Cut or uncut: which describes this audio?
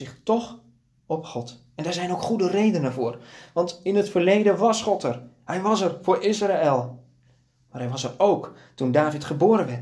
uncut